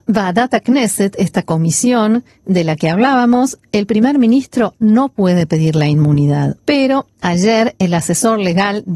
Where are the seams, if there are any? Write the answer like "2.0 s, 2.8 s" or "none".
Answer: 6.6 s